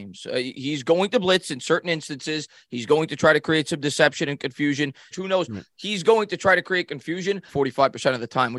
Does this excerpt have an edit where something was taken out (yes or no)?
yes